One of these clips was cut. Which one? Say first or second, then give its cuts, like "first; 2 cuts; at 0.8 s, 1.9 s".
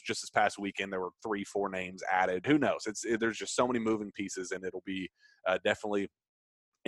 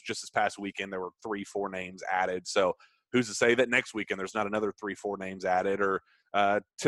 first; 1 cut; at 2.4 s